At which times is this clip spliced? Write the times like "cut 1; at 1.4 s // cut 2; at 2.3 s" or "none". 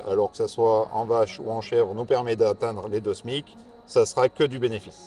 none